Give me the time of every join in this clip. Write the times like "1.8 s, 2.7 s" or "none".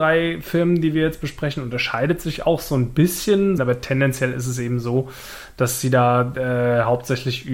3.6 s